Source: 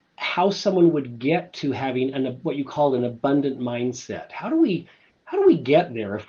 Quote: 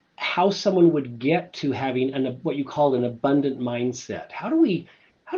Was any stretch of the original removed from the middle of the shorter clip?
no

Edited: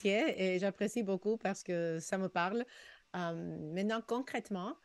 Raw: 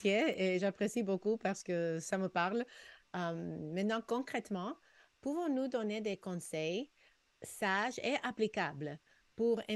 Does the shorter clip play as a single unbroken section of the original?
yes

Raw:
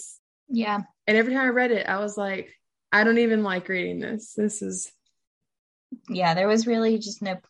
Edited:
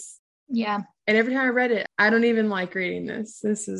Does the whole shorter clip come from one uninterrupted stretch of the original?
no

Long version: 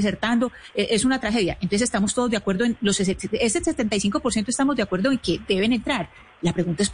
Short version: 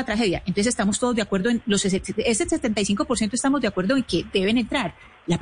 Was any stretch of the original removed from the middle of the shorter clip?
no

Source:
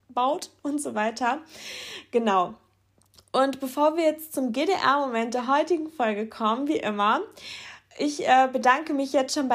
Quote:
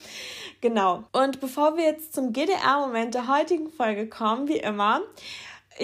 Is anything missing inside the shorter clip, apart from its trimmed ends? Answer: yes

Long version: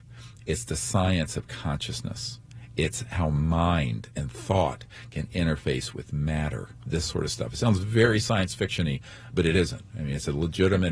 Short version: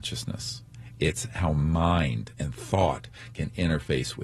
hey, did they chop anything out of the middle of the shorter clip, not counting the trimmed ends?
no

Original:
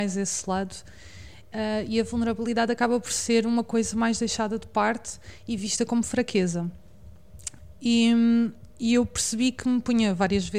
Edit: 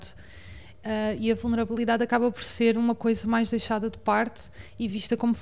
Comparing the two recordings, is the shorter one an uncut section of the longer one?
yes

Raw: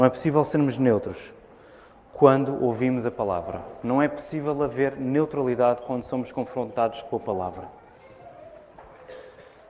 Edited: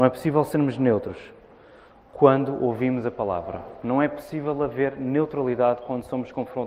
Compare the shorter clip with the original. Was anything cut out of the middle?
no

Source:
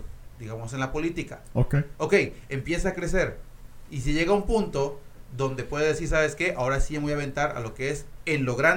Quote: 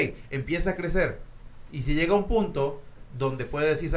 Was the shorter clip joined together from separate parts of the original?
no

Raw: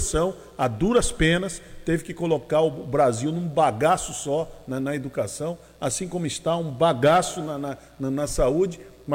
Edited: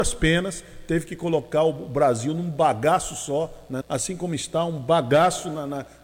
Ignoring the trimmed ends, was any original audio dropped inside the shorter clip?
yes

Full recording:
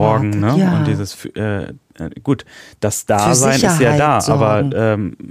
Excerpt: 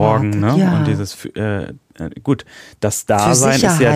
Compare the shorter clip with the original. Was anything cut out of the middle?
no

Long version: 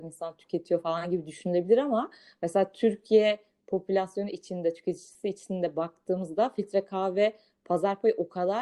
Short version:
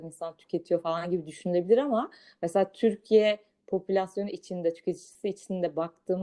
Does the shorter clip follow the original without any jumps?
yes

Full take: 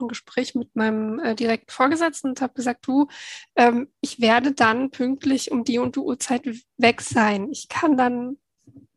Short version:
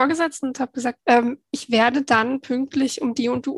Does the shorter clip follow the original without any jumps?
no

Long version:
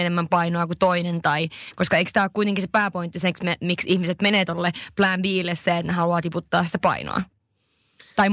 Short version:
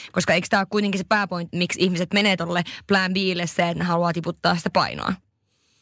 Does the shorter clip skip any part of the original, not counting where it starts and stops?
yes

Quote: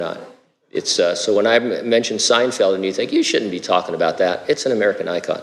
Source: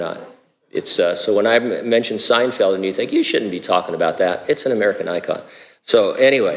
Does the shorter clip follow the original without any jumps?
yes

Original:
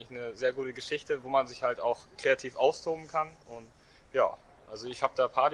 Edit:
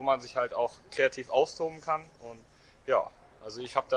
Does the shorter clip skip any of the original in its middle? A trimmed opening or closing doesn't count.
no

